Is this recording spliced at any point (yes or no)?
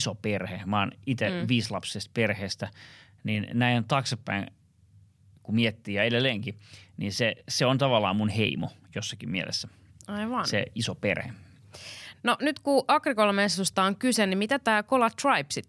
no